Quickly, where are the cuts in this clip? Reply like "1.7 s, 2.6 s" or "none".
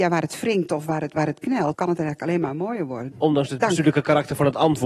1.7 s, 3.1 s

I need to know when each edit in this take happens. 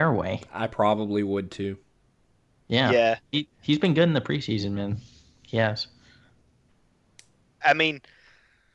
7.6 s

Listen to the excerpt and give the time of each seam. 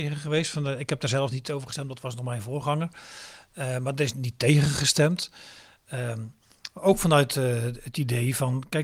4.1 s

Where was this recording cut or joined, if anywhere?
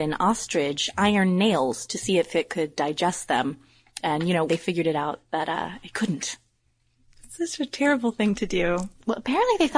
4.5 s

